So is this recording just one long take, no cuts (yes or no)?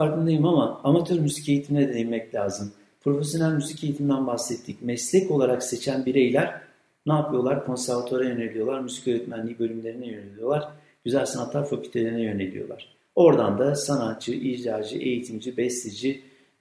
yes